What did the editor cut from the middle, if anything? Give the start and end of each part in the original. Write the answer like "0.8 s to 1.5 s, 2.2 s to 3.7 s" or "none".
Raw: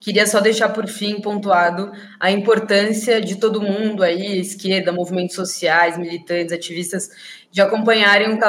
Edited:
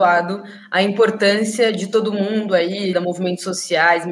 4.4 s to 4.8 s